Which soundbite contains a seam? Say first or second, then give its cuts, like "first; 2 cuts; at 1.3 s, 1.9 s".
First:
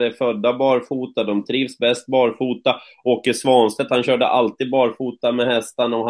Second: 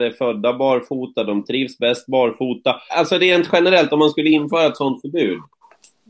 second; 1 cut; at 2.9 s